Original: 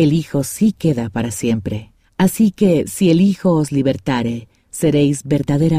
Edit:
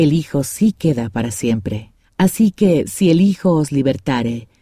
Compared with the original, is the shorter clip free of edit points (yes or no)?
yes